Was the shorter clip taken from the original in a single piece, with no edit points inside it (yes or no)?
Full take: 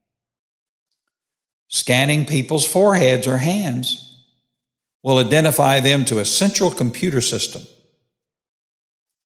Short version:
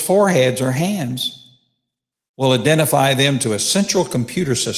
yes